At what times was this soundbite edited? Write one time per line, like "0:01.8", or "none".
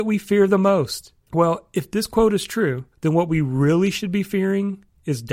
0:01.3
0:02.9

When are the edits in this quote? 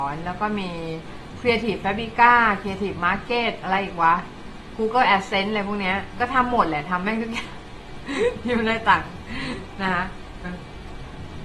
0:10.4

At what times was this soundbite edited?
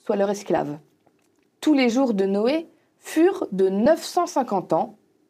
0:01.5

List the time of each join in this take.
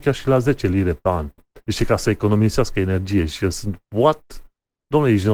0:01.4

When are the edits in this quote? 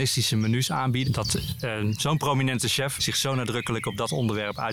0:01.1
0:03.0

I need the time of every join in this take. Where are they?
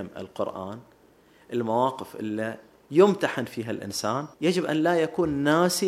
0:04.3

